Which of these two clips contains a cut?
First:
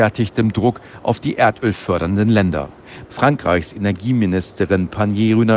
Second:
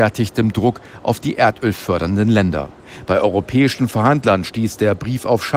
first; 1 cut; at 3.1 s

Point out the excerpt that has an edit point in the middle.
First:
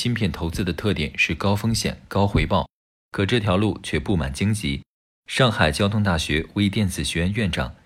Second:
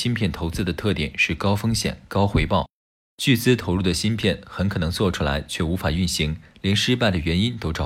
first; 1 cut; at 2.9 s

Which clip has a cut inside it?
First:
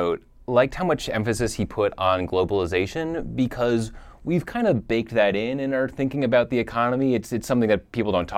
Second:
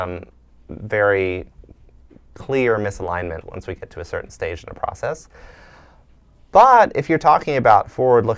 second; 1 cut; at 3.4 s

